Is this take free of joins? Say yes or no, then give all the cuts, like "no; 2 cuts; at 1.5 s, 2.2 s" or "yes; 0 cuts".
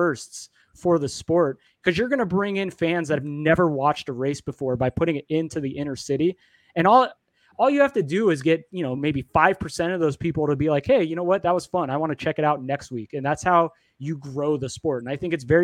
yes; 0 cuts